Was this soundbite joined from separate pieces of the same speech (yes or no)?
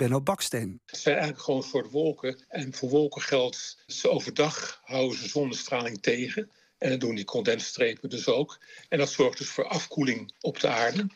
yes